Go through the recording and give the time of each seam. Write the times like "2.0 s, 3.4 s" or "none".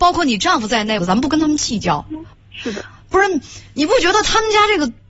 1.0 s, 2.3 s